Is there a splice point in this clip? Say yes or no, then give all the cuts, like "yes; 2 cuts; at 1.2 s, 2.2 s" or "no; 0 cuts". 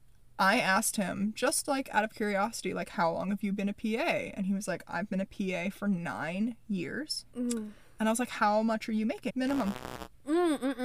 yes; 2 cuts; at 7.3 s, 9.3 s